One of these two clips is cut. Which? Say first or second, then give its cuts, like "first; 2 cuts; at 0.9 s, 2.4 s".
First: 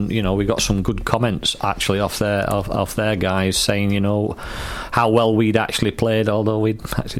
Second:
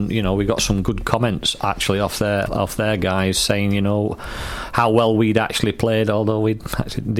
second; 1 cut; at 2.5 s